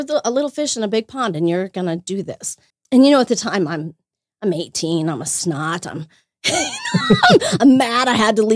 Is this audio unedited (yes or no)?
no